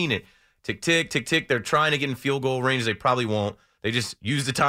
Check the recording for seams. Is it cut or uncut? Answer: uncut